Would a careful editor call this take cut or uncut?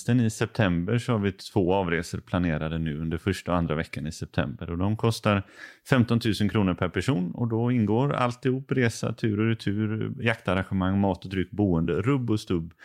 uncut